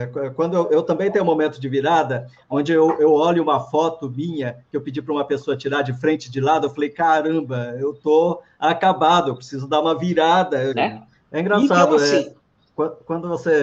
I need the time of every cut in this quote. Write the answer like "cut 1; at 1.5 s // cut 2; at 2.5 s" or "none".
cut 1; at 10.7 s